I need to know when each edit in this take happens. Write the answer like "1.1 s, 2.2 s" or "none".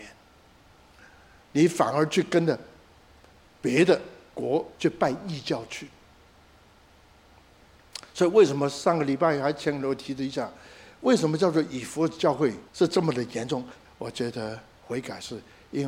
4.8 s, 12.7 s, 13.9 s